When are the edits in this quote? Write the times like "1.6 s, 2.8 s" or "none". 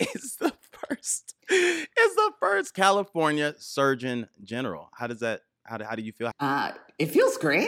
1.4 s, 6.3 s